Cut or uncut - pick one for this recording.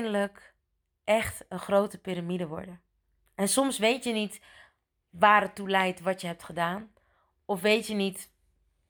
uncut